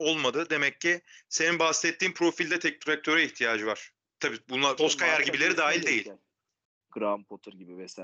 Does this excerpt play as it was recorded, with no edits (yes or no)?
no